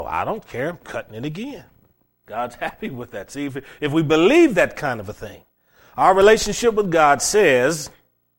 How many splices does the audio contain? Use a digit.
0